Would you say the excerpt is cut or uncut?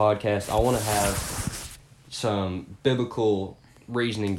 uncut